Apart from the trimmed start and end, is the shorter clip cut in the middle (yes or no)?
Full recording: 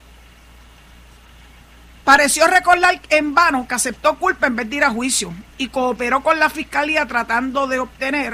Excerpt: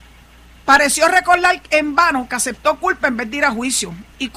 no